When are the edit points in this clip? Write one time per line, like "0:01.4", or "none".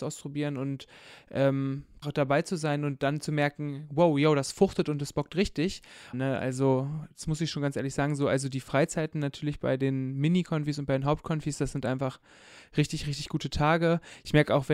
0:02.0
0:06.1

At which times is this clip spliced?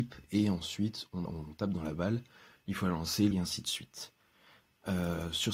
0:01.2
0:03.3

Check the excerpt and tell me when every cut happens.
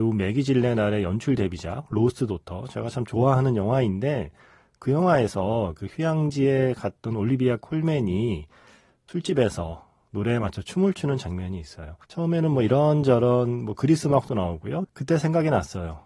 0:12.0
0:14.8

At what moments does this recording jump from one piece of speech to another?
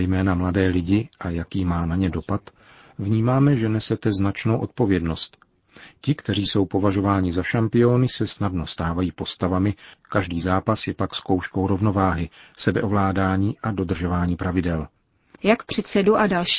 0:09.9
0:15.4

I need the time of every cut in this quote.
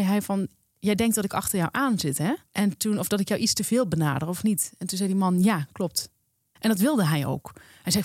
0:02.5
0:06.6

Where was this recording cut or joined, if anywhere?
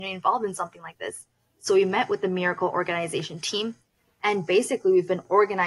none

